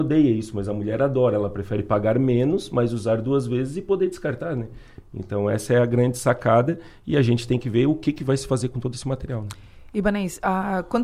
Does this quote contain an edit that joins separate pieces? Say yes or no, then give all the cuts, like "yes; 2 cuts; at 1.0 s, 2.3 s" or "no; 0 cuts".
no; 0 cuts